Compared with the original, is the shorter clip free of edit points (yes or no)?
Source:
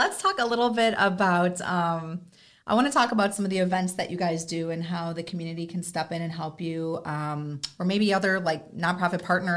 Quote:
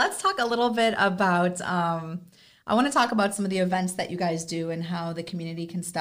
yes